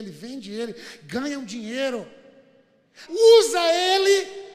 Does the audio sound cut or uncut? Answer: cut